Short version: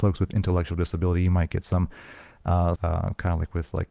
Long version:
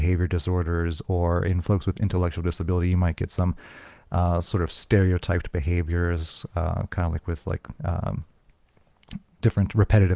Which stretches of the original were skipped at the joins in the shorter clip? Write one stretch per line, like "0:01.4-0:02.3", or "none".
0:04.4-0:06.5